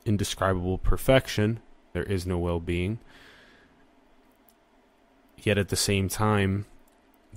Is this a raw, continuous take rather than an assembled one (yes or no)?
no